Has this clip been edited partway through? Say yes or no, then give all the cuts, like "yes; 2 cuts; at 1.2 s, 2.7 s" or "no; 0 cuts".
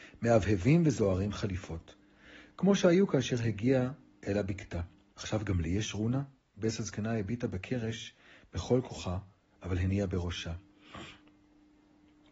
yes; 1 cut; at 5.1 s